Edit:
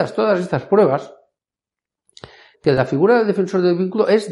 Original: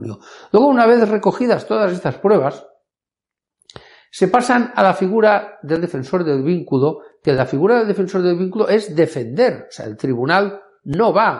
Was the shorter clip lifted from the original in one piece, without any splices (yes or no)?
no